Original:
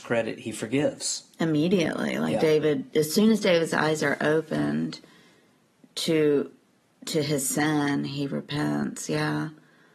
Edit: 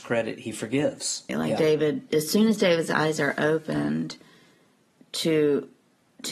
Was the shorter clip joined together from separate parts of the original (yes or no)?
yes